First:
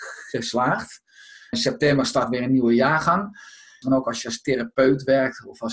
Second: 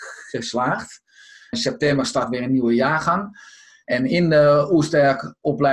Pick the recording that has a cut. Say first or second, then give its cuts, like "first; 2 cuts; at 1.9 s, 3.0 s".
first; 1 cut; at 3.8 s